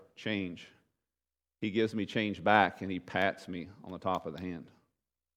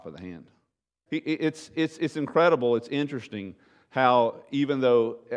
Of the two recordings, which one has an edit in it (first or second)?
second